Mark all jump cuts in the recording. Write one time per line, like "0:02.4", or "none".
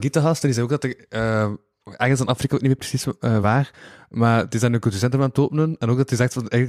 none